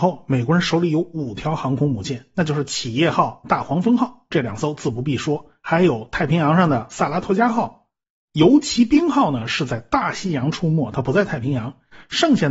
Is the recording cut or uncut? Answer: uncut